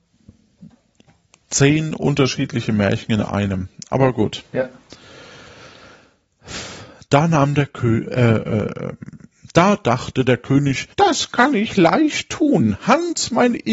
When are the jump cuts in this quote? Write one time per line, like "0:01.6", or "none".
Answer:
0:10.9

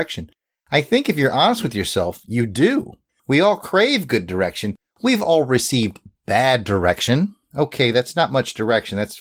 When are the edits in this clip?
0:07.4

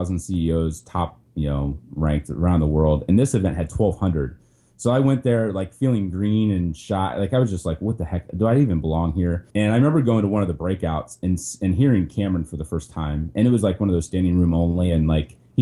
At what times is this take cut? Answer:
0:09.5

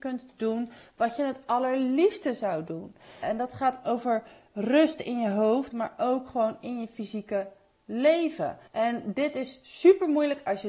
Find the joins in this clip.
0:03.2
0:05.7
0:08.7

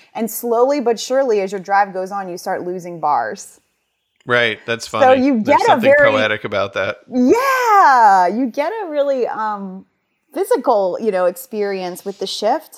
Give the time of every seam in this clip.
none

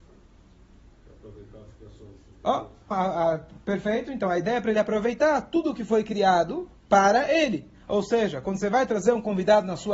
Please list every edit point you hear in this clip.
0:02.9

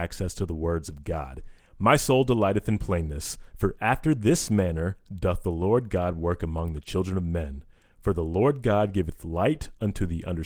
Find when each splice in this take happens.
0:01.6

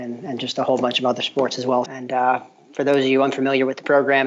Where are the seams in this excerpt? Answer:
0:01.9

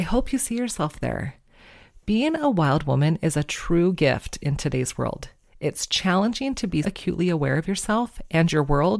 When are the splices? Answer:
0:06.8

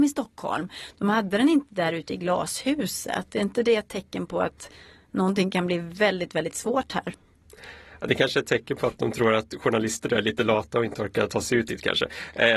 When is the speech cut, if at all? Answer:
none

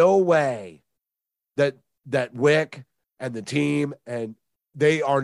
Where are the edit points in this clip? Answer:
none

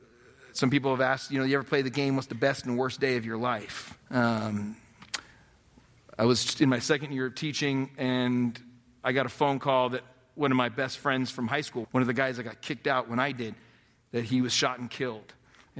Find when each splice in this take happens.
0:04.0
0:11.8

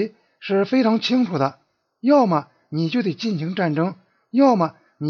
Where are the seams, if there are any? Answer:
none

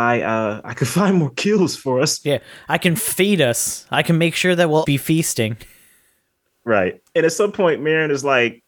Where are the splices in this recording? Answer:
0:04.8

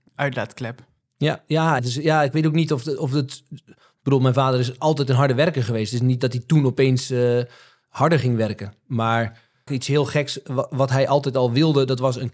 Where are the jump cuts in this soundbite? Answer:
0:01.8
0:09.7

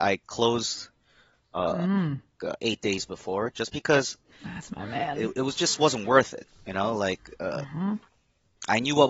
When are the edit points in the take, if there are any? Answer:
0:02.4

